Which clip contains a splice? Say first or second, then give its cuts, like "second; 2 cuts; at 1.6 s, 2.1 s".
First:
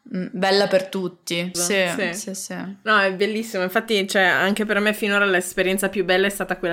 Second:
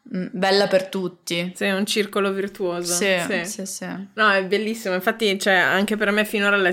first; 1 cut; at 1.5 s